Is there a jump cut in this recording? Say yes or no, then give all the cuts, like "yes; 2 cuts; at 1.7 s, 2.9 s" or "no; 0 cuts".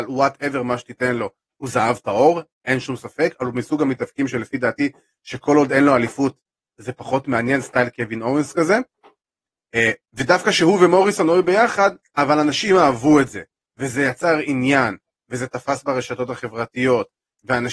yes; 2 cuts; at 10.0 s, 12.0 s